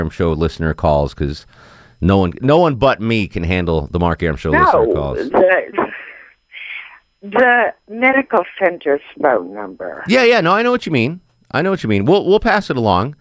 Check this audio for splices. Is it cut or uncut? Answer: uncut